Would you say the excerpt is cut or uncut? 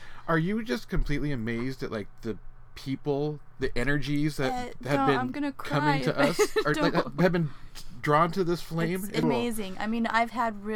uncut